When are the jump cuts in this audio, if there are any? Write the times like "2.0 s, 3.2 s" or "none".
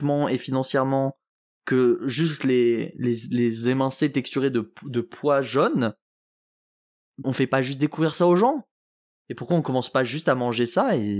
7.2 s